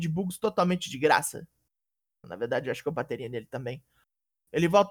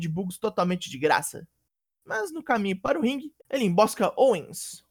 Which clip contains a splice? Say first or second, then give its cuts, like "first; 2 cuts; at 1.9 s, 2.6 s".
second; 2 cuts; at 1.9 s, 3.4 s